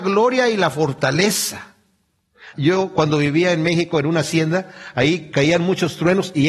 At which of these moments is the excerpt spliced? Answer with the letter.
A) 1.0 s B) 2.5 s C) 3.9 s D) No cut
B